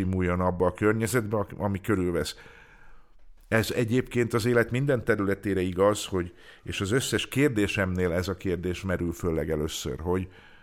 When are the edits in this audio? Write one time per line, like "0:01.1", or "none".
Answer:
0:03.4